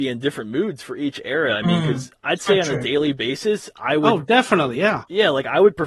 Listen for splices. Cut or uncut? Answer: uncut